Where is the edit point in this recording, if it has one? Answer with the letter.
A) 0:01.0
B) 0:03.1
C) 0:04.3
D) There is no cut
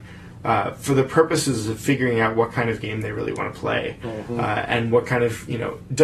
D